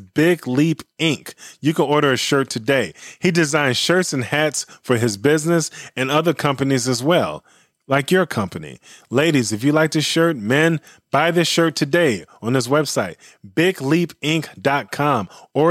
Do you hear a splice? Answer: no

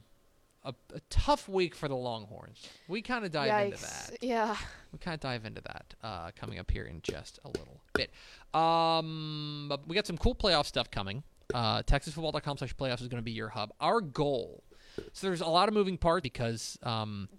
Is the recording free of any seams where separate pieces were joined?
no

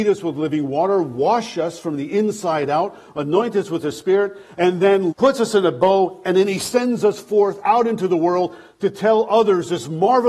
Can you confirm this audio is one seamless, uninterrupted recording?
no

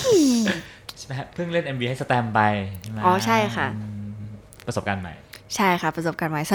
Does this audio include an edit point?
no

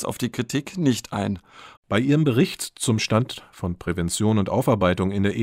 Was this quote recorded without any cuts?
no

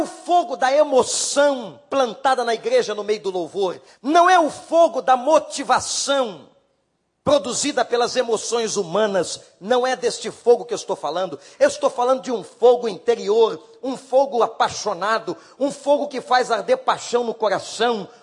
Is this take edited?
yes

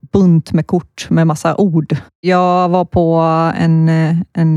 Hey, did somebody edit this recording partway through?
yes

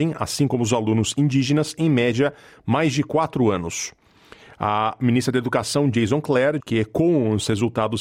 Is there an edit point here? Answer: yes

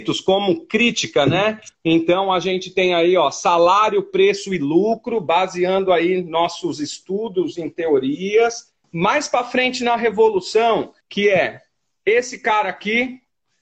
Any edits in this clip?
yes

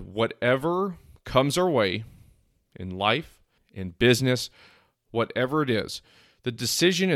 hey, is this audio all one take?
no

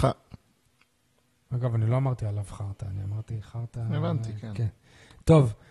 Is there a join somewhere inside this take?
no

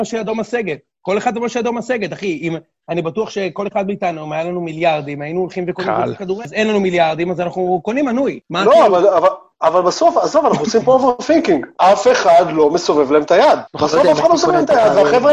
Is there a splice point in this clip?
no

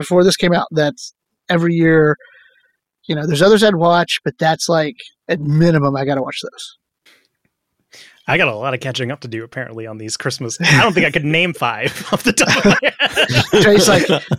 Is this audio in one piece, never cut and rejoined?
yes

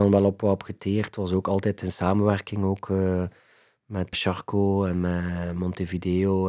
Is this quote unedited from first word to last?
no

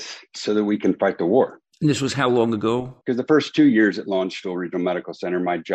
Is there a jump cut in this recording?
yes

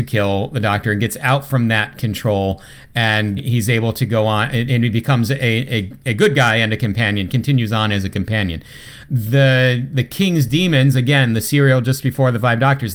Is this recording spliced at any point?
yes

